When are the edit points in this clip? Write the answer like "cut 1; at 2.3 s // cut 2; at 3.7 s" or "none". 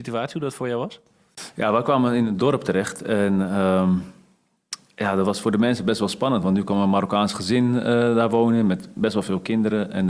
none